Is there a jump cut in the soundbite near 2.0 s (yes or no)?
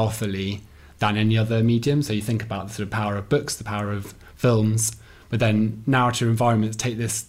no